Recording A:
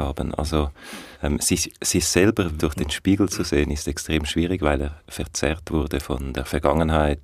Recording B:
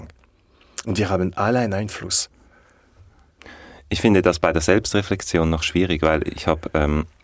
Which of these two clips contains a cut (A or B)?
A